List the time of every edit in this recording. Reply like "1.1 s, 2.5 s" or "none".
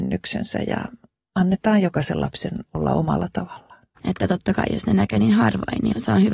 4.0 s